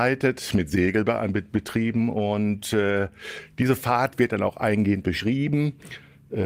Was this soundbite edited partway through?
no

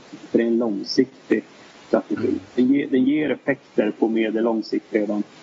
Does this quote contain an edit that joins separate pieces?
no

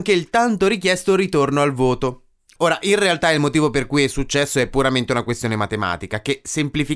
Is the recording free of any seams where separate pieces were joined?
no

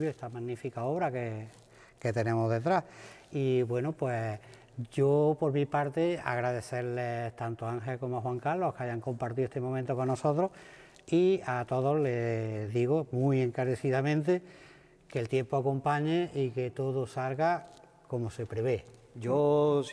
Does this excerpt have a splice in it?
no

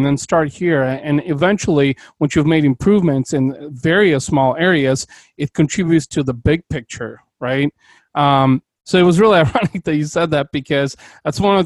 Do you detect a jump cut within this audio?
no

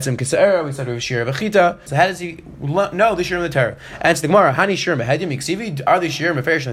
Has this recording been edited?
yes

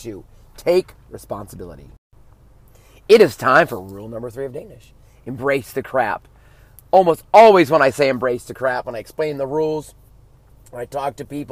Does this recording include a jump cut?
no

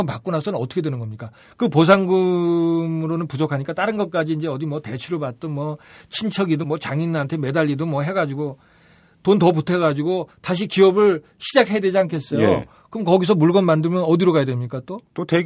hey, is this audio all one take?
no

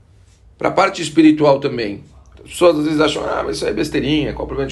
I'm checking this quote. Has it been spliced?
yes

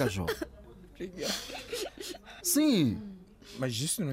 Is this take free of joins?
no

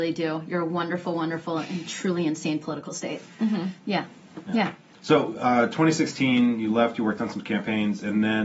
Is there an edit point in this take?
no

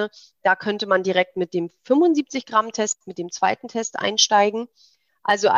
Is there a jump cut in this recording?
no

